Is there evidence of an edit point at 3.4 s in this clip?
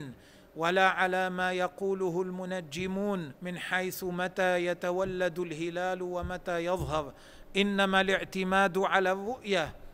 yes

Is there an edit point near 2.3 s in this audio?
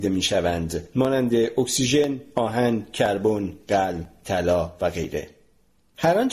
no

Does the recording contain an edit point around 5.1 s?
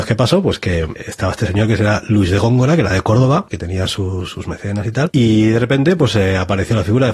no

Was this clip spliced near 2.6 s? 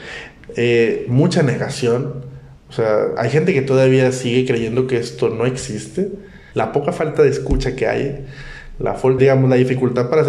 no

